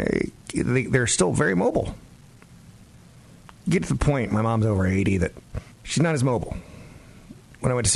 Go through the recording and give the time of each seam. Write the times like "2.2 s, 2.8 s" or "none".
5.7 s